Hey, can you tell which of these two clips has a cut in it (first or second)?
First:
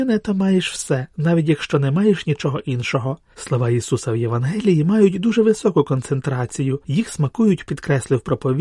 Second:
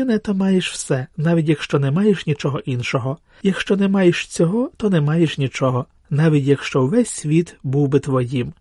first